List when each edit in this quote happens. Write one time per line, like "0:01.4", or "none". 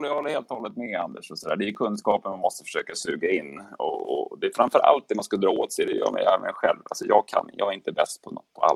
none